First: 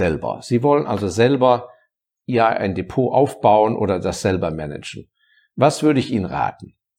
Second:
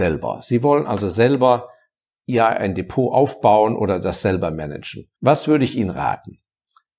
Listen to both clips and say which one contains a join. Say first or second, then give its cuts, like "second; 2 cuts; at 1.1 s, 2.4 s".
second; 1 cut; at 5.2 s